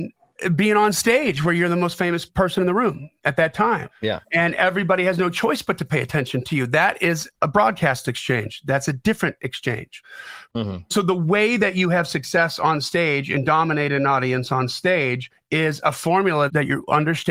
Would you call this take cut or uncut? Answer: uncut